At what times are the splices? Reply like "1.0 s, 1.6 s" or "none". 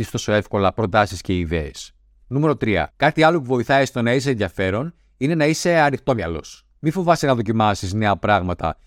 2.9 s

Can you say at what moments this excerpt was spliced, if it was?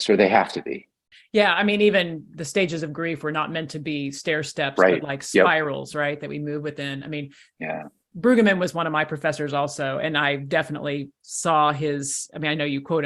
none

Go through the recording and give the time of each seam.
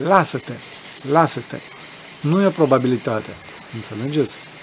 2.2 s, 3.7 s

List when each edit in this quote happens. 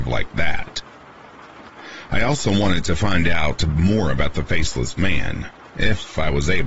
2.0 s

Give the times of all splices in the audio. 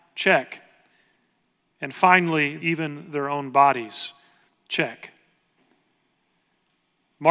2.6 s

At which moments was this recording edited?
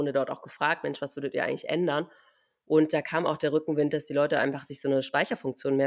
none

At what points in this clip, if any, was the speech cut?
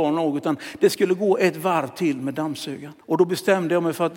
3.0 s

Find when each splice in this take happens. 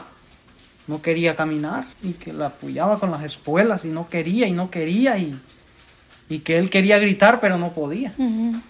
1.9 s

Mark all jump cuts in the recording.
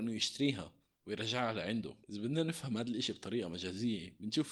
2.0 s

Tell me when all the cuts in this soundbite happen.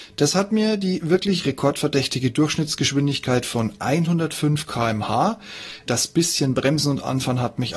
5.9 s

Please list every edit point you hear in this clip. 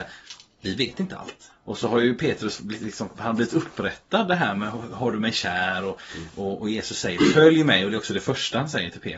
1.5 s

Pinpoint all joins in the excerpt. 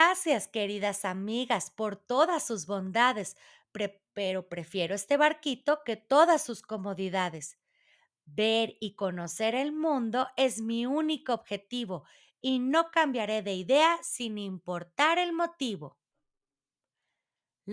none

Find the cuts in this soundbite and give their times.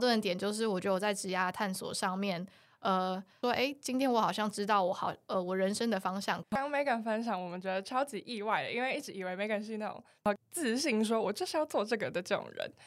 3.4 s, 6.4 s

